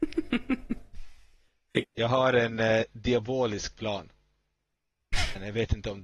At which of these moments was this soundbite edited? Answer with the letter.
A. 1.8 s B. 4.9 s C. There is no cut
A